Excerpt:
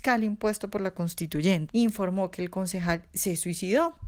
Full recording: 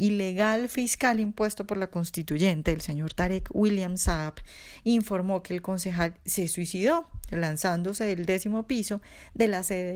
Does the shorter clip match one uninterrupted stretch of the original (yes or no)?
no